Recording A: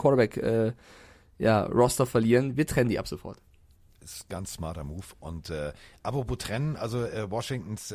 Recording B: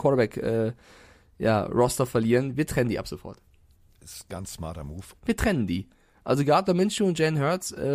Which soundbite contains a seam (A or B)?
B